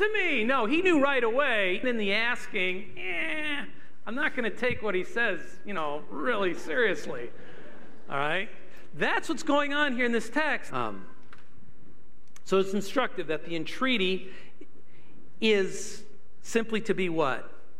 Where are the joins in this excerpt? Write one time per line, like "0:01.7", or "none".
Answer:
0:01.8
0:10.7